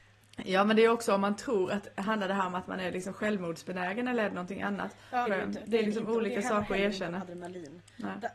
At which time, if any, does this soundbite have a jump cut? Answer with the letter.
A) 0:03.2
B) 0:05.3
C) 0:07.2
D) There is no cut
B